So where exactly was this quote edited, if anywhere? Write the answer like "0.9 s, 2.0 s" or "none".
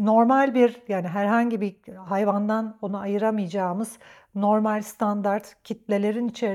none